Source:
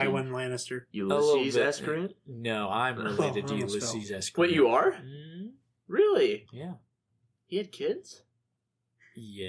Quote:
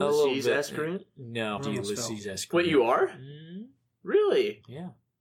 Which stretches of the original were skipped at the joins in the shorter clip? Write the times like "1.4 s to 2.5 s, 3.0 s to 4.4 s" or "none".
2.7 s to 3.4 s